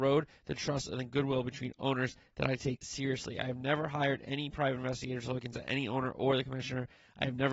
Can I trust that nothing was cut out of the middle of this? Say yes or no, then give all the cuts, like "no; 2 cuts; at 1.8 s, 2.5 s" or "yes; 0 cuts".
no; 1 cut; at 2.8 s